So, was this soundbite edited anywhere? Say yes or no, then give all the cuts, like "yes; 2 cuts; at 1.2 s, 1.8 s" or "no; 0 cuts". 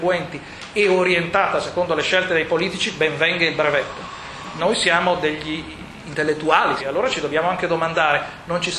yes; 2 cuts; at 4.6 s, 6.8 s